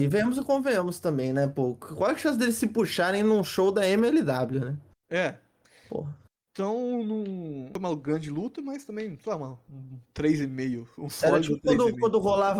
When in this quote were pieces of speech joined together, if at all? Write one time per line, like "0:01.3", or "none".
none